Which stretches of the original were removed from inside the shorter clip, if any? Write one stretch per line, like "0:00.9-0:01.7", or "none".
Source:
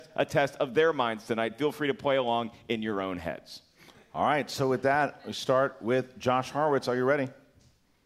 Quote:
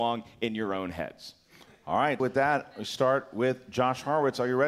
0:04.5-0:04.7